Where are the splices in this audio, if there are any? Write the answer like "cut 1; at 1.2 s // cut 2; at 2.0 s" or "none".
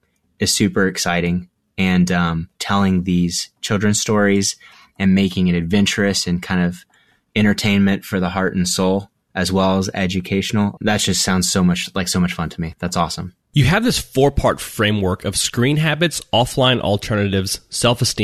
cut 1; at 2.5 s // cut 2; at 10.8 s